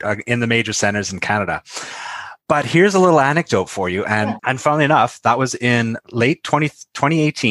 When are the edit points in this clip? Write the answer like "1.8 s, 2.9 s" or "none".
2.4 s, 4.4 s